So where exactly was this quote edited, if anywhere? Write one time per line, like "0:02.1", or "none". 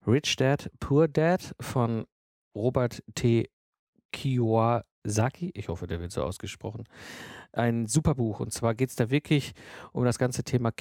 0:04.9